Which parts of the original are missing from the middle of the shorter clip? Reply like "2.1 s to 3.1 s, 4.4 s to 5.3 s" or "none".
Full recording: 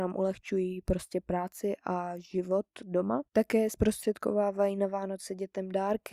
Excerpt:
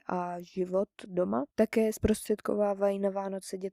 none